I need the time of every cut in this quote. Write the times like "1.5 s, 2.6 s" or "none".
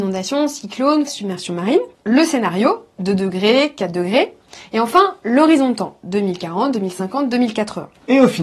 1.1 s